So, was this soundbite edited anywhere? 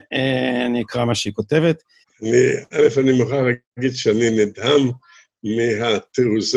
yes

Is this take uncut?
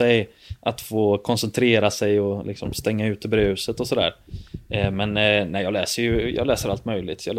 yes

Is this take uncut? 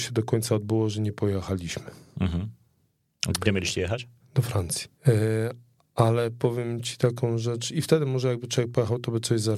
no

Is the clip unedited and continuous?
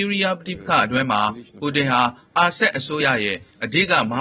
yes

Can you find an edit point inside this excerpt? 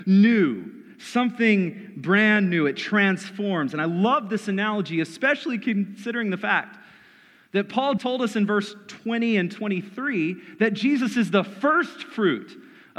yes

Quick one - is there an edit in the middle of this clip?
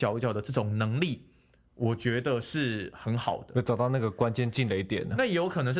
no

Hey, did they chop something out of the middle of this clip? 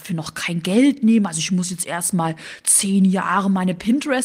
no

